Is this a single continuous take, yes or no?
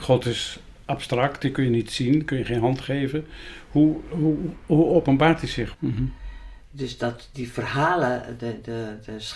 no